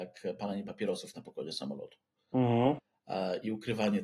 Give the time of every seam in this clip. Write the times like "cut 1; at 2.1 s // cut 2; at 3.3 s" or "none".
none

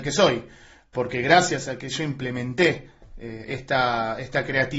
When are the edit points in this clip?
none

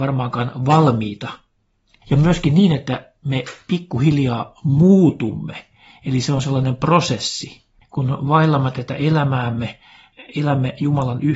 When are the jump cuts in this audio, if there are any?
cut 1; at 2.0 s

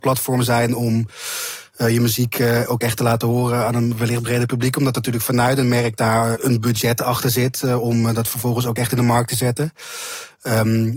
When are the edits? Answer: cut 1; at 6.3 s

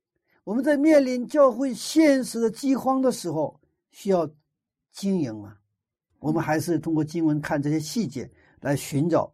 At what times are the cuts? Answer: cut 1; at 6.1 s

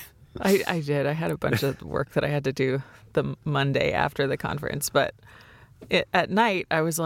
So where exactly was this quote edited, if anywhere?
none

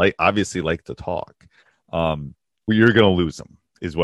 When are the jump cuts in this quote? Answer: cut 1; at 2.7 s

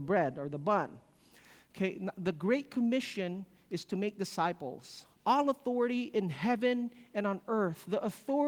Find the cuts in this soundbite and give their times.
cut 1; at 5.1 s

